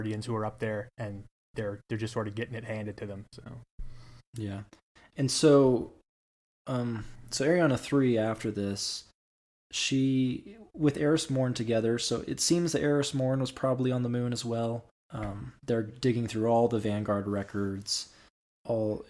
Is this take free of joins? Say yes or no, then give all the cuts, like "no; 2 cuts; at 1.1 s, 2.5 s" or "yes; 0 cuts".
no; 1 cut; at 15.1 s